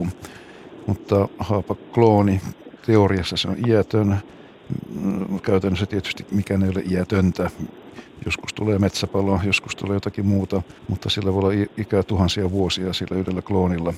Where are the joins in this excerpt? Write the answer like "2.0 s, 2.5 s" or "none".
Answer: 10.8 s